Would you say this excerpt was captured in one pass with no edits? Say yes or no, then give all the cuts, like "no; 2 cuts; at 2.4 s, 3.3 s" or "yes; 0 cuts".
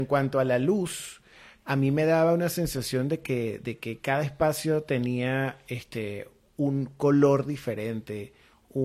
yes; 0 cuts